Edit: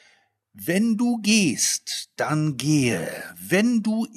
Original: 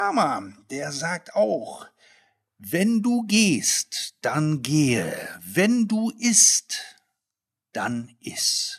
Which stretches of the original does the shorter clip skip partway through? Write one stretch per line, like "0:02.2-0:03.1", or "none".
none